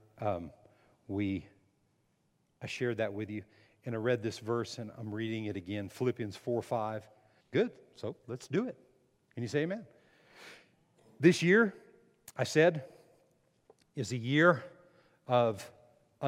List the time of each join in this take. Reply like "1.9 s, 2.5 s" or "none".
7.4 s